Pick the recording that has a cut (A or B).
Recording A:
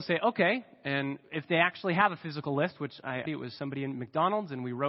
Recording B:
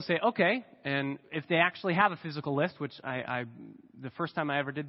A